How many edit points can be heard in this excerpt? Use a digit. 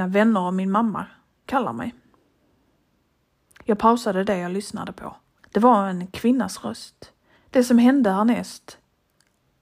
2